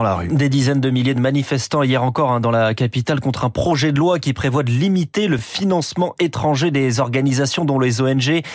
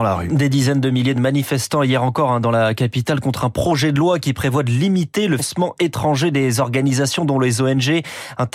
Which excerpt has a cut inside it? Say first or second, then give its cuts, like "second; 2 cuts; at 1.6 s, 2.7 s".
second; 1 cut; at 5.4 s